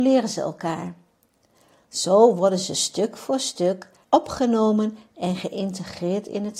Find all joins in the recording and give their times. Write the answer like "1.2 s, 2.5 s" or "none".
4.0 s